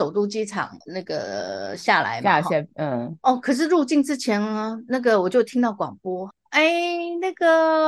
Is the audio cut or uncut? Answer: cut